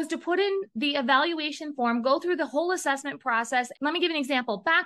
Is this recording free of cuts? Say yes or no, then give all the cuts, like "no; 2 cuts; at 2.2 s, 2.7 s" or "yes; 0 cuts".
no; 1 cut; at 3.7 s